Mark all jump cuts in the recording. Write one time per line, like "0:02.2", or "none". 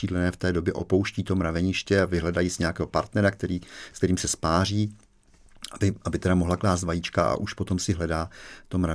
none